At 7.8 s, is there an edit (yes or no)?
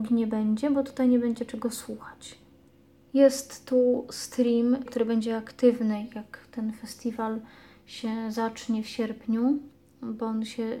no